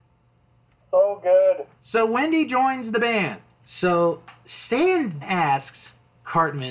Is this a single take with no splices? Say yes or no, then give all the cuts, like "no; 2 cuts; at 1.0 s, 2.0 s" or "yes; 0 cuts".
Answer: no; 3 cuts; at 1.8 s, 3.6 s, 5.2 s